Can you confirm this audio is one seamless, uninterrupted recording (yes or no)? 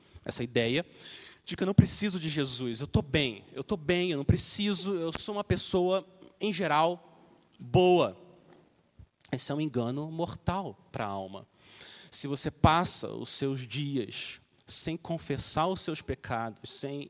yes